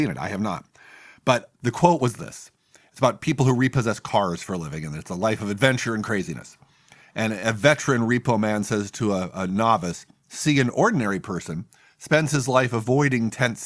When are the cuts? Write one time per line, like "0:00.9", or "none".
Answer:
none